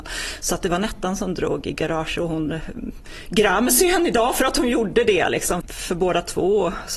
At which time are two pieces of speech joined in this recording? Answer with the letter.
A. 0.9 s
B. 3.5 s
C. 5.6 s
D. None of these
C